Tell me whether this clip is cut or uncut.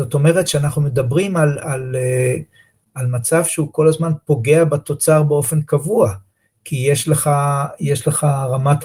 uncut